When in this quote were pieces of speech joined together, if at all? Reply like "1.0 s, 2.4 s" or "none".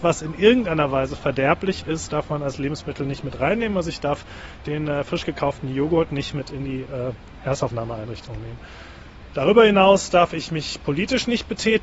none

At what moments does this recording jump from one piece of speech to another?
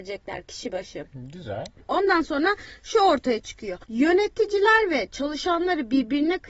3.8 s

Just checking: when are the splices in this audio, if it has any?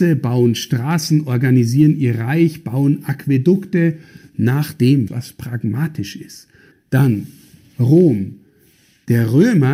5.1 s, 6.7 s

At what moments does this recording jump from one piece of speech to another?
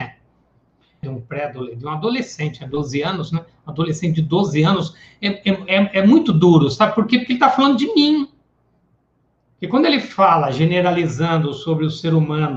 1.0 s

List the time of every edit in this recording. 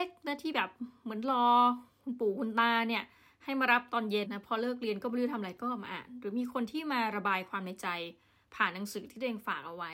4.2 s

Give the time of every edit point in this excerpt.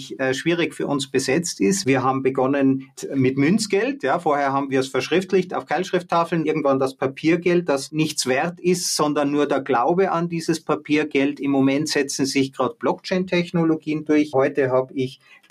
6.4 s

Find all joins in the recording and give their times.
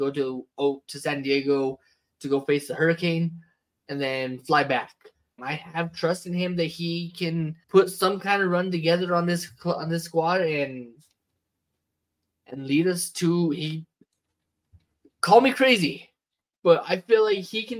5.4 s, 7.6 s

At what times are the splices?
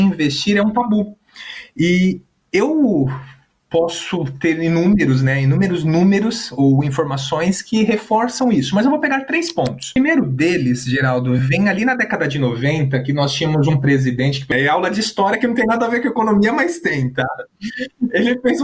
none

